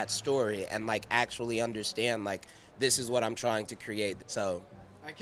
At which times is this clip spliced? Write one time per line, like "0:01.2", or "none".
0:04.2